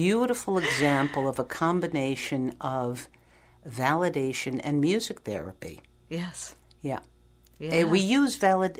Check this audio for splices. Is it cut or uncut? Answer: uncut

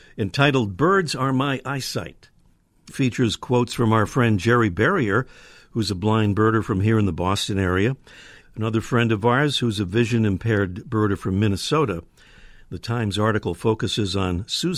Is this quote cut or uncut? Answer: cut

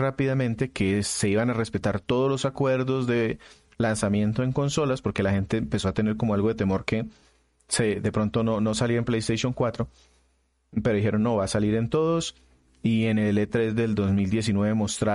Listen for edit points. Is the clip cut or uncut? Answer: uncut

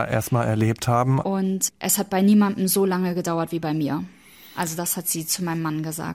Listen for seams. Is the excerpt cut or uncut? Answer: cut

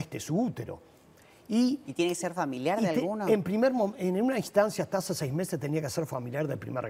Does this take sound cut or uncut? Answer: uncut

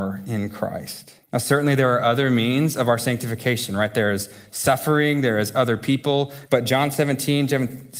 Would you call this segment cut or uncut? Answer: cut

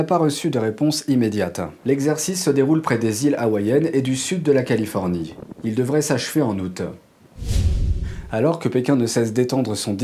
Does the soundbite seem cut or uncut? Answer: cut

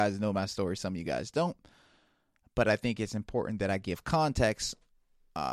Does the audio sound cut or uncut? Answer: uncut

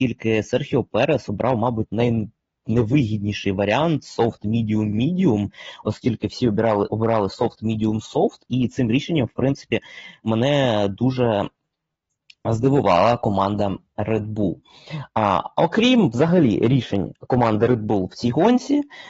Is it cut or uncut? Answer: uncut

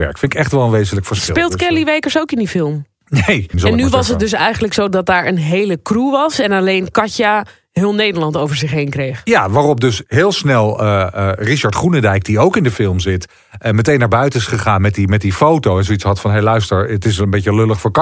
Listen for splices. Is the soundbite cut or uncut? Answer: cut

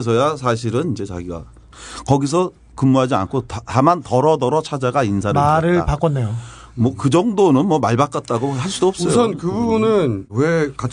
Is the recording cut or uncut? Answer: uncut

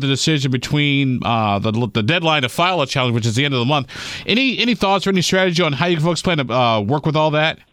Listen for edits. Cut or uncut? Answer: uncut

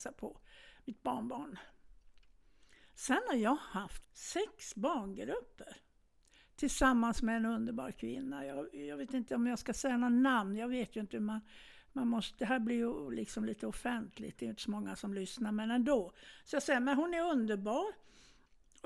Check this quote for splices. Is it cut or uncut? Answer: cut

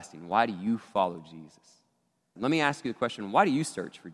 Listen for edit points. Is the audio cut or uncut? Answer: cut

